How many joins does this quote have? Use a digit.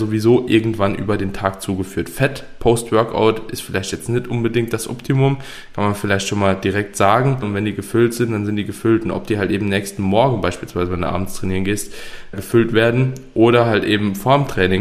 2